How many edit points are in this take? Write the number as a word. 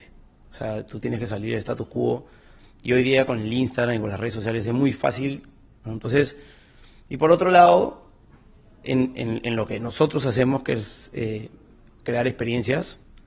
one